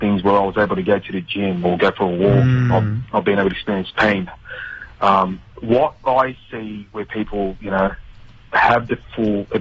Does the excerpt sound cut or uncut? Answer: uncut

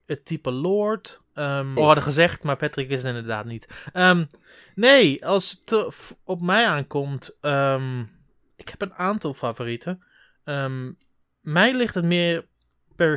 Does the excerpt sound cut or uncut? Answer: cut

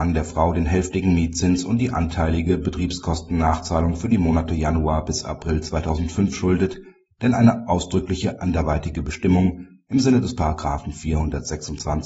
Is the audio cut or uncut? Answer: uncut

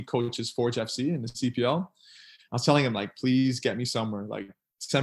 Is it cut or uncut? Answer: uncut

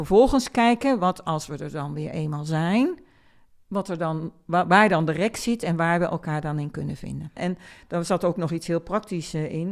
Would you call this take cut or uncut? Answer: cut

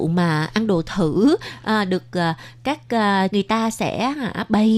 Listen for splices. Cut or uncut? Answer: cut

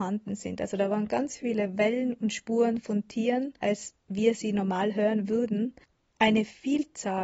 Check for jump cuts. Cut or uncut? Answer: cut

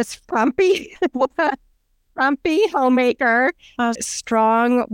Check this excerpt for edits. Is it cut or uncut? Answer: cut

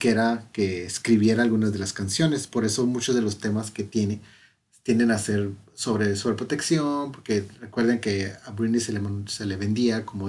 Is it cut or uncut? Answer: uncut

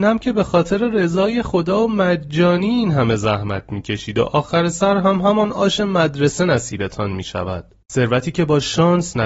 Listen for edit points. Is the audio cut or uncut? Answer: cut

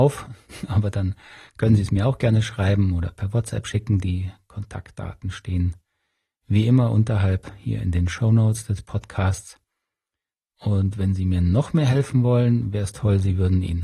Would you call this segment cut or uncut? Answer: cut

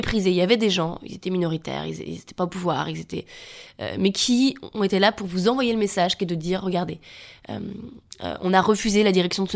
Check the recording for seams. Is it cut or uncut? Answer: uncut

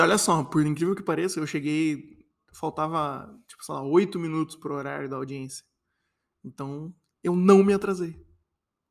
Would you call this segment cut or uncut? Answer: uncut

